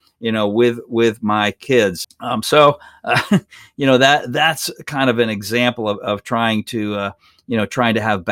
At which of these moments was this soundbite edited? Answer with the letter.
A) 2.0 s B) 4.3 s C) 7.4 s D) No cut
A